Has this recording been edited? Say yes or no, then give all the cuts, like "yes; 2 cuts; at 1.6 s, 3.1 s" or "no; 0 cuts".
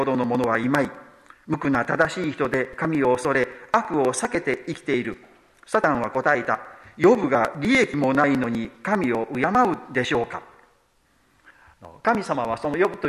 no; 0 cuts